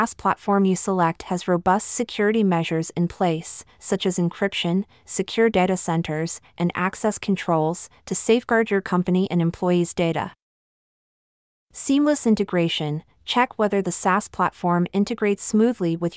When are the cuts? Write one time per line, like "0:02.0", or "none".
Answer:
none